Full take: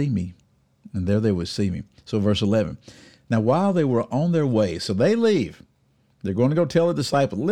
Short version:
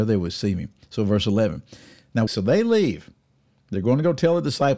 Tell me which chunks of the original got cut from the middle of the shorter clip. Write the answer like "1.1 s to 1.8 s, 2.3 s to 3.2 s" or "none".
3.4 s to 4.8 s